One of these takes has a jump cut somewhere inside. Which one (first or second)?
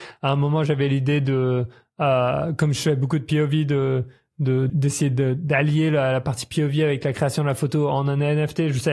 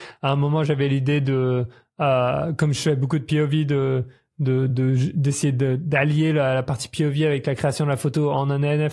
first